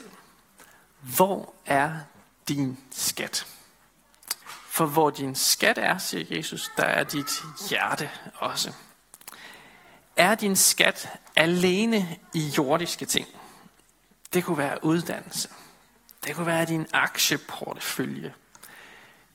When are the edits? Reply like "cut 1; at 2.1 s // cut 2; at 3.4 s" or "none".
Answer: cut 1; at 4.4 s